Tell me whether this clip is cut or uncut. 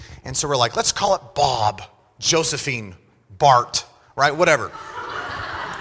uncut